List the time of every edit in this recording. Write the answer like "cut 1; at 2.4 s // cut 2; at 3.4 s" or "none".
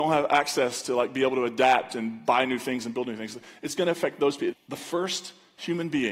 cut 1; at 4.5 s